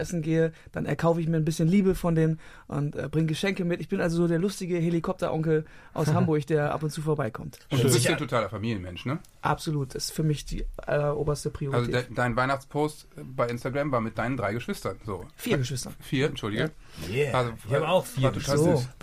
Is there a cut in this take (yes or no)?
no